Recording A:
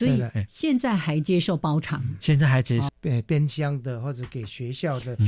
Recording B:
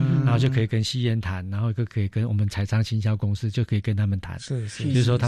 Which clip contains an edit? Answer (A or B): A